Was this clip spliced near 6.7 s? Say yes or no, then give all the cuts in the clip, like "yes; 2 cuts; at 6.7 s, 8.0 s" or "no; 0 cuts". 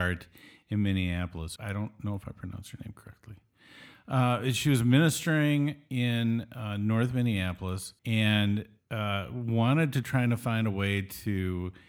no; 2 cuts; at 1.6 s, 8.0 s